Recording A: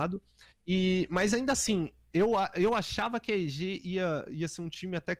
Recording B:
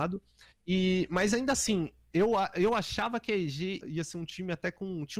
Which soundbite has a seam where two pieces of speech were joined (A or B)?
B